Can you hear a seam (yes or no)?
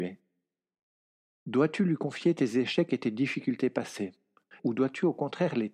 yes